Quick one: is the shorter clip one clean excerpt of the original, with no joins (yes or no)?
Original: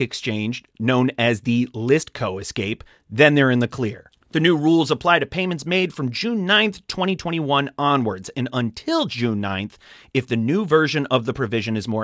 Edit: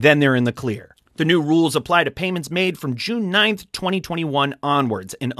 yes